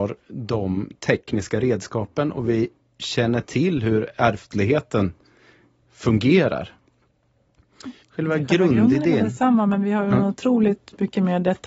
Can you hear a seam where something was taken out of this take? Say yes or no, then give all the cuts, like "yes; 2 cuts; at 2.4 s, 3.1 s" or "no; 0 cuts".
yes; 1 cut; at 8.0 s